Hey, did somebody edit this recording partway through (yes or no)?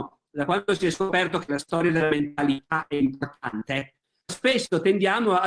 yes